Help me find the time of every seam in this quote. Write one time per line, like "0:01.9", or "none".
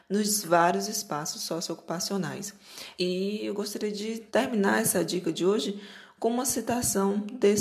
0:03.0
0:04.3